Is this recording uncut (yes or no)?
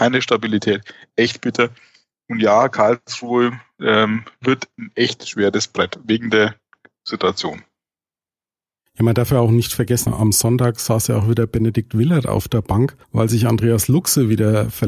no